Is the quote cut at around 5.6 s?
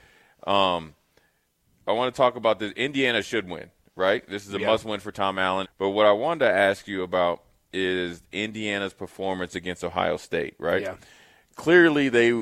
yes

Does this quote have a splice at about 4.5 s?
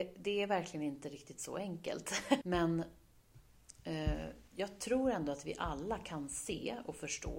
yes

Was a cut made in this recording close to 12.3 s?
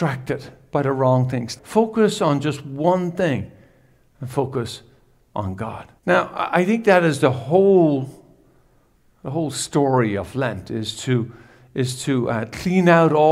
no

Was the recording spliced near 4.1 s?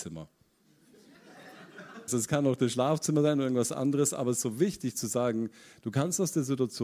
no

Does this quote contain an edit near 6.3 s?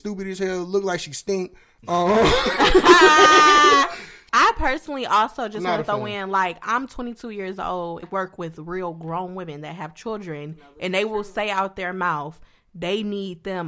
no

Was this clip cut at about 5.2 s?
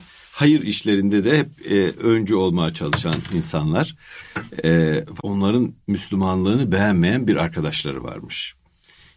yes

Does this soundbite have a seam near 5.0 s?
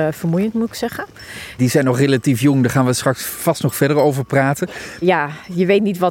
yes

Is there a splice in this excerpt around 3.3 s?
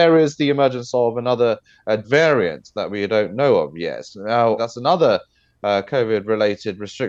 no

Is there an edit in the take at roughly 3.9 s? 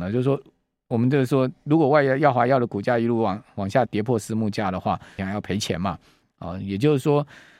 yes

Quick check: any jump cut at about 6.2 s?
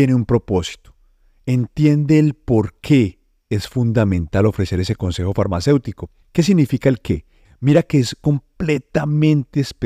yes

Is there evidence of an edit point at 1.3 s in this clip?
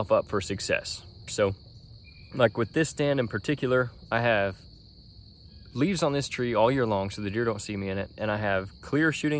yes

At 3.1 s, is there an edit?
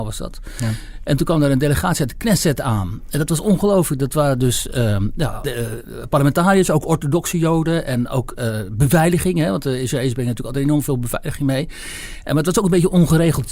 no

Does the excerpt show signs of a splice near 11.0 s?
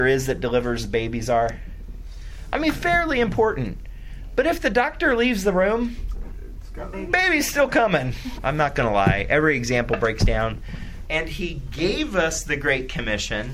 yes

